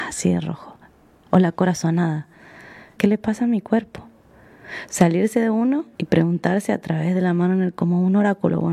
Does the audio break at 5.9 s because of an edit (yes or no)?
yes